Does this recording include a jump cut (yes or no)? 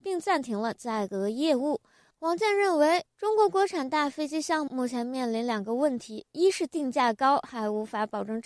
yes